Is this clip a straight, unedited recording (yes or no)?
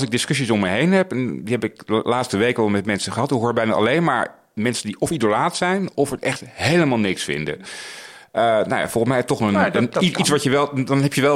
yes